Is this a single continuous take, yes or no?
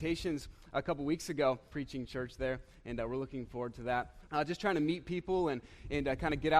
no